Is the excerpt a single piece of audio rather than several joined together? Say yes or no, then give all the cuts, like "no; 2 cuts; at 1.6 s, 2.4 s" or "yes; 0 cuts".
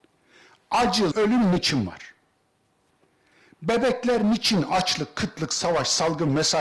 no; 1 cut; at 1.1 s